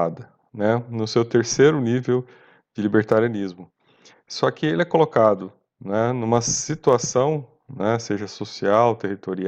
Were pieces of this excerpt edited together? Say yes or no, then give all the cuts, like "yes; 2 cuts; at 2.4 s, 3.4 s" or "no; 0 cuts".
no; 0 cuts